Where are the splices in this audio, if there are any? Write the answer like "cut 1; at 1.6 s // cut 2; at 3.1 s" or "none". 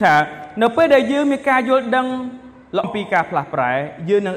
cut 1; at 2.8 s